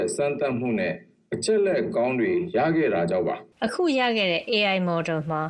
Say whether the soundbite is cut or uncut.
cut